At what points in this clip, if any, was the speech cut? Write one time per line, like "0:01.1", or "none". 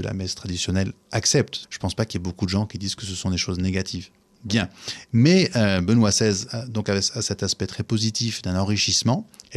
0:01.6